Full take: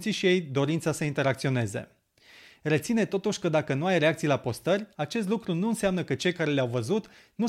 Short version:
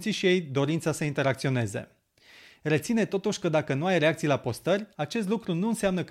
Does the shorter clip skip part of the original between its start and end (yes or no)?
no